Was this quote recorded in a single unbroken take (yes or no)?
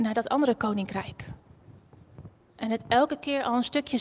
no